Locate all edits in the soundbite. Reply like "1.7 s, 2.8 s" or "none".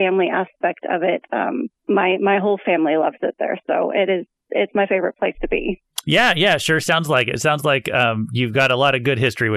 1.8 s

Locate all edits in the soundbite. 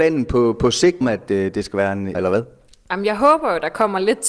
1.0 s, 2.1 s

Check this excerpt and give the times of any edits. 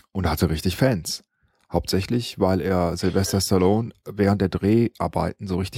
none

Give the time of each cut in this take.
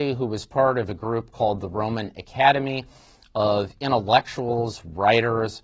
none

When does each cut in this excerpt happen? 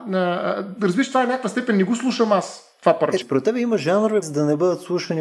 3.2 s, 4.2 s

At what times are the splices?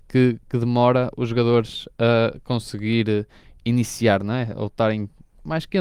none

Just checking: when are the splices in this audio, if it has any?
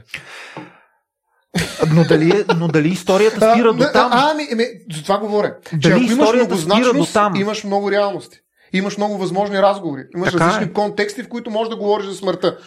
none

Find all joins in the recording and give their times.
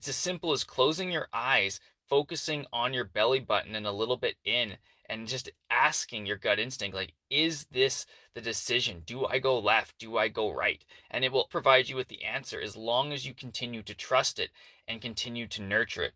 11.5 s

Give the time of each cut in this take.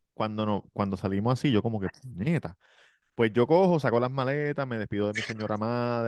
none

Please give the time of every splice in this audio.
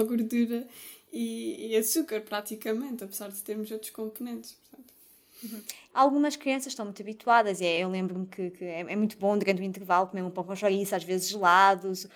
none

